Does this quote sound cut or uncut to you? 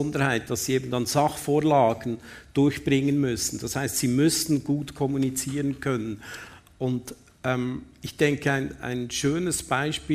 uncut